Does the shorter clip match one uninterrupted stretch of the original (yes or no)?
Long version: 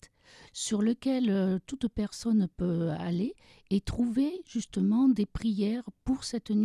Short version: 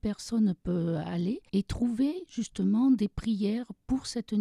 no